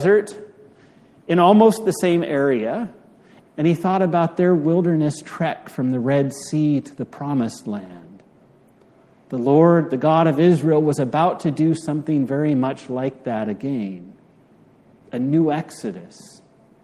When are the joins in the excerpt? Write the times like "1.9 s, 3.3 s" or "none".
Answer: 3.4 s